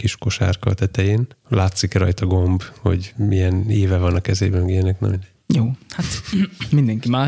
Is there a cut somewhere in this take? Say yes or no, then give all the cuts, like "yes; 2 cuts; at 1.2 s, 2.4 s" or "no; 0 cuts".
no; 0 cuts